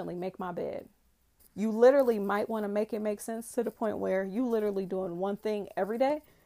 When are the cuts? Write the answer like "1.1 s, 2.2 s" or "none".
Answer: 1.4 s

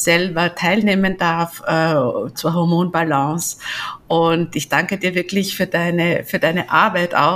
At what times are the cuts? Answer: 2.3 s

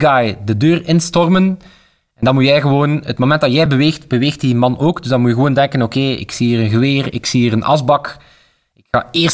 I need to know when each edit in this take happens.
none

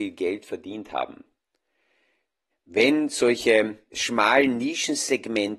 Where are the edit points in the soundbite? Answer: 2.5 s, 3.9 s

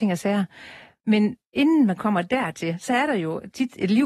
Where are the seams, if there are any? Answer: 1.4 s

